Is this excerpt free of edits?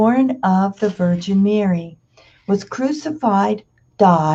yes; 0 cuts

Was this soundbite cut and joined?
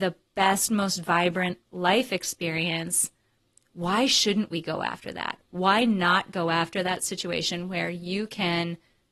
no; 0 cuts

